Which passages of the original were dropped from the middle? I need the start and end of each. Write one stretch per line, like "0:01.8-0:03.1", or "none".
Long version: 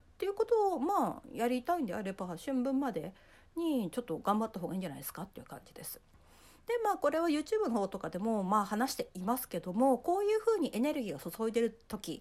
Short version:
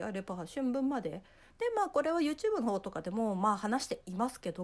0:03.4-0:06.6